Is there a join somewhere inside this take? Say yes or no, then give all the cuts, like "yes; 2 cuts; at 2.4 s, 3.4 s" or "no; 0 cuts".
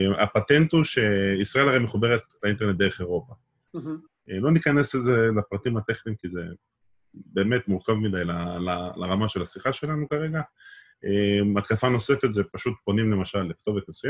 yes; 1 cut; at 4.1 s